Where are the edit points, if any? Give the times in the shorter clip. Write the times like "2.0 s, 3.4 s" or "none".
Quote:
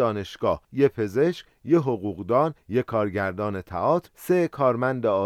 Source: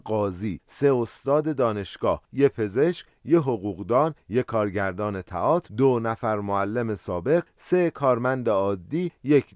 4.1 s